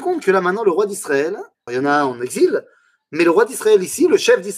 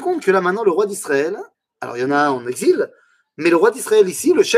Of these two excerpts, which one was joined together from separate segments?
first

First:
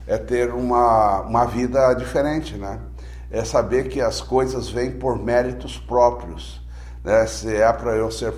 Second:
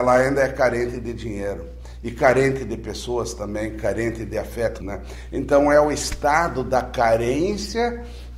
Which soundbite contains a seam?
second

